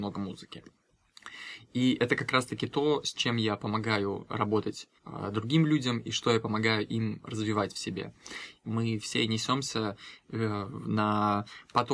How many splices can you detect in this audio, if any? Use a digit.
2